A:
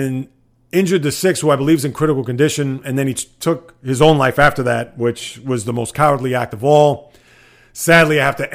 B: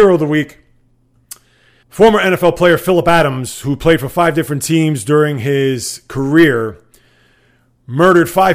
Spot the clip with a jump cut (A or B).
B